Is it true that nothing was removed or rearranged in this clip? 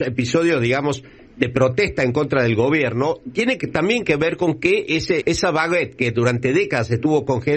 no; 1 cut; at 5.2 s

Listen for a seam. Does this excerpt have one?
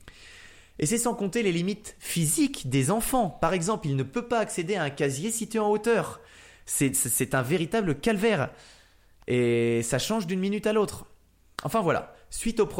yes; 1 cut; at 6.6 s

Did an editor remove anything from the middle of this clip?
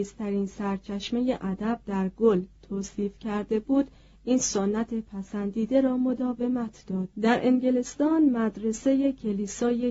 yes; 1 cut; at 7.1 s

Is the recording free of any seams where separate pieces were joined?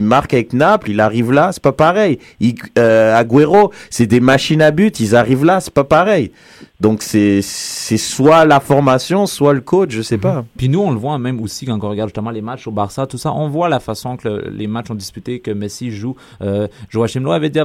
yes; 0 cuts

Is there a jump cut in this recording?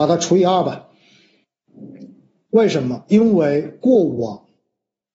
no; 0 cuts

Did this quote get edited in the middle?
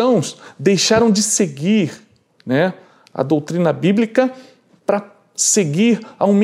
no; 0 cuts

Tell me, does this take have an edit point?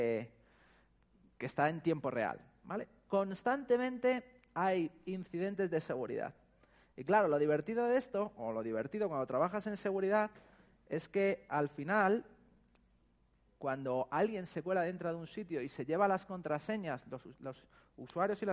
no; 0 cuts

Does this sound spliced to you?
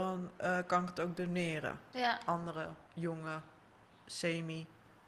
yes; 1 cut; at 1.9 s

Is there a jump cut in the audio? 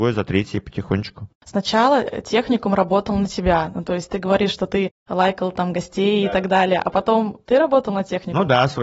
no; 0 cuts

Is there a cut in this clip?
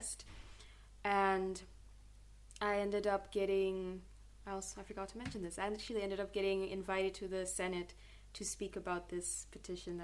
no; 0 cuts

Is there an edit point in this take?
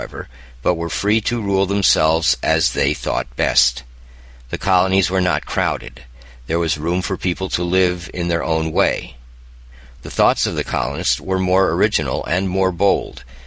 no; 0 cuts

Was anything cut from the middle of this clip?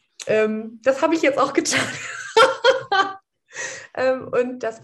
no; 0 cuts

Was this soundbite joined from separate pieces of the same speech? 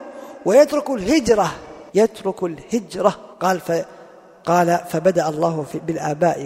yes; 2 cuts; at 1.9 s, 3.3 s

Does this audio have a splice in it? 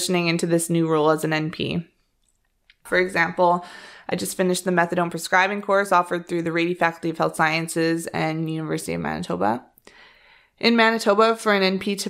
yes; 1 cut; at 2.9 s

